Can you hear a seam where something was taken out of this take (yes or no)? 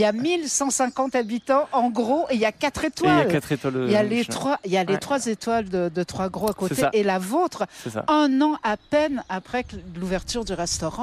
no